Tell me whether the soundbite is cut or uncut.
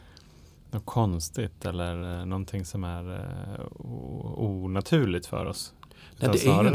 uncut